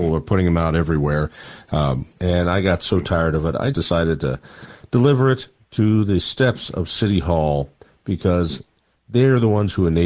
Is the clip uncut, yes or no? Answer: no